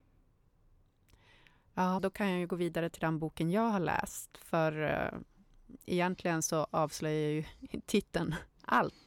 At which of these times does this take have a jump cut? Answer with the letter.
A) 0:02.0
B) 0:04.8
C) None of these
A